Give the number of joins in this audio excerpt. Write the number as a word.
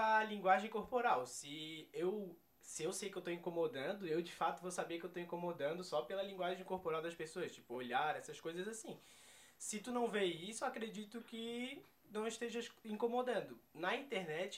zero